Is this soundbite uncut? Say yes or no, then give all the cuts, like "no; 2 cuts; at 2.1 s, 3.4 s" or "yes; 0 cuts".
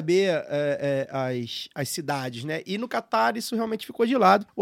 yes; 0 cuts